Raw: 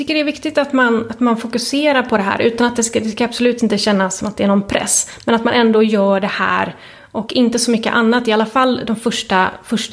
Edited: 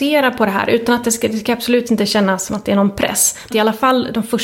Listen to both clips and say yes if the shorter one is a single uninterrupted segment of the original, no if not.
no